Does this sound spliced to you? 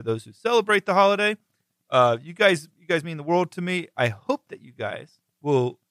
no; 0 cuts

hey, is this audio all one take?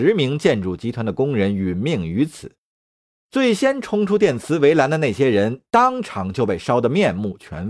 yes; 0 cuts

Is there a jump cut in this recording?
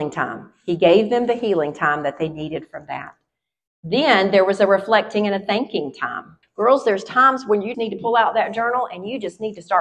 yes; 2 cuts; at 6.4 s, 7.7 s

